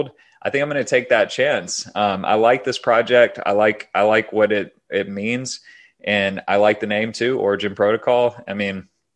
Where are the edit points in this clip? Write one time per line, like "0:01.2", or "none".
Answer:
none